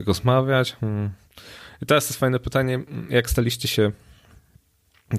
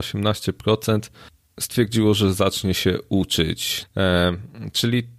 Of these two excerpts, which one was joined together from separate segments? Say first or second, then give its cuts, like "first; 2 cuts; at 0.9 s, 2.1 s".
second; 1 cut; at 3.8 s